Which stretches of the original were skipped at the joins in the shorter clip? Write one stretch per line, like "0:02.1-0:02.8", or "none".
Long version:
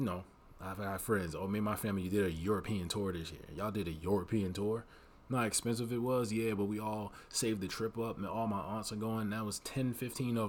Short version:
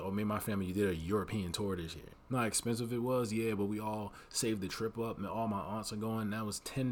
0:03.5-0:05.1